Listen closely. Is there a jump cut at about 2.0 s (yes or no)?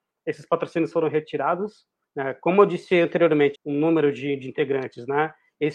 yes